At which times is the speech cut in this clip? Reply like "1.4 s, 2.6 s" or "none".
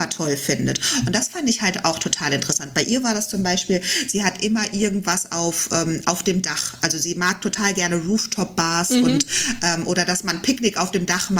none